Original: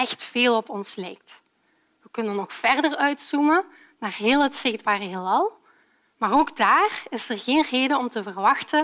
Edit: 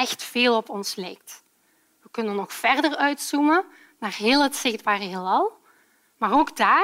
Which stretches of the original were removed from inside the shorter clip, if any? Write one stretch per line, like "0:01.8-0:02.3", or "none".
none